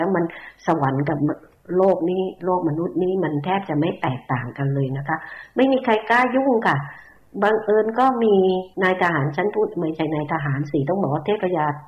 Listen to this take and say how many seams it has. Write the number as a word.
one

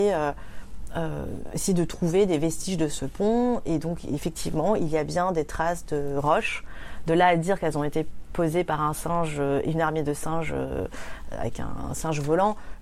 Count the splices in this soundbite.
zero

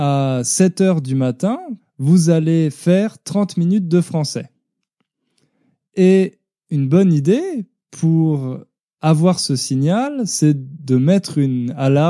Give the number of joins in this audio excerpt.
one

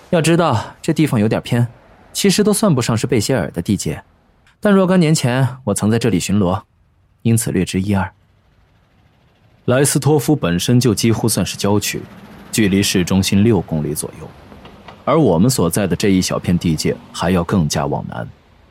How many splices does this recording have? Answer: one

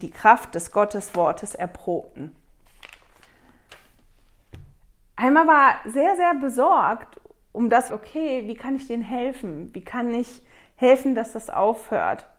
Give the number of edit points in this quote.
one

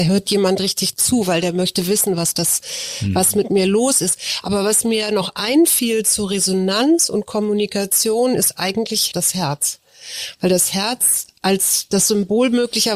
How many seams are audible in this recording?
zero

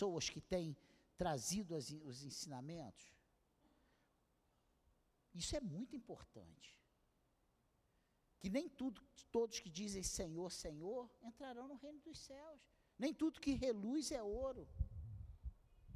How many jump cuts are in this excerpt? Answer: zero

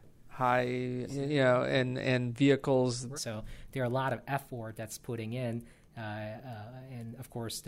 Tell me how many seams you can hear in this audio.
two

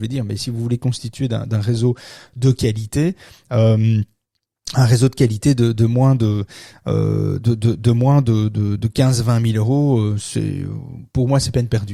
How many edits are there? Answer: one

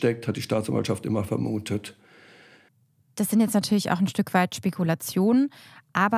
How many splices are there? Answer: zero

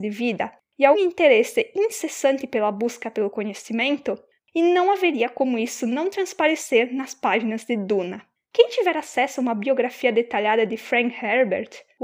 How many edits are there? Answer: three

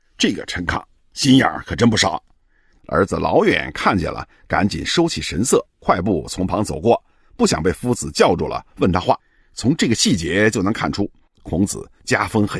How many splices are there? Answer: one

